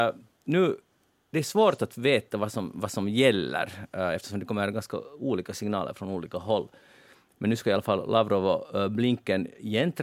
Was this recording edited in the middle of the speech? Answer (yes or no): no